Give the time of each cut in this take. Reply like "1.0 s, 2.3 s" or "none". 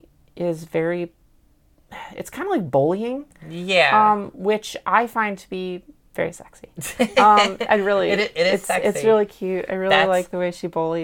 none